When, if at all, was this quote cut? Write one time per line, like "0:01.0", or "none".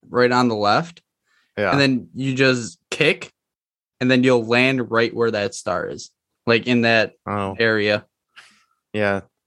none